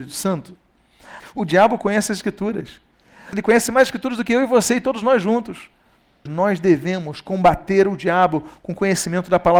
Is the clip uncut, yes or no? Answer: no